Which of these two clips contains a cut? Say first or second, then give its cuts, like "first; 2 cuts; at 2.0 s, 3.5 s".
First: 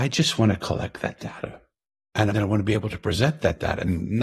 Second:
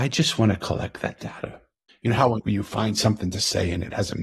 second; 1 cut; at 1.9 s